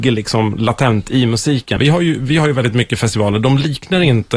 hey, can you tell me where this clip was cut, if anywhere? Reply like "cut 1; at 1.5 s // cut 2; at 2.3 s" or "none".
cut 1; at 1.8 s